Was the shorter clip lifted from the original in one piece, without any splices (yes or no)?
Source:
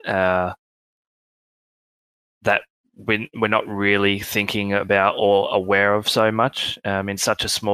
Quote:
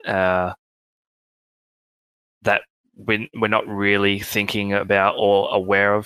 yes